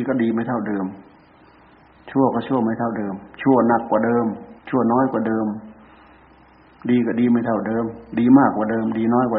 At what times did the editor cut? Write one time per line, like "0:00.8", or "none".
0:04.6